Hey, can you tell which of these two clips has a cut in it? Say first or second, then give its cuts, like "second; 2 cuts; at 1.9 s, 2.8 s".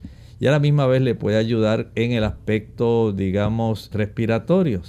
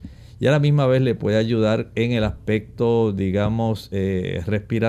first; 1 cut; at 3.9 s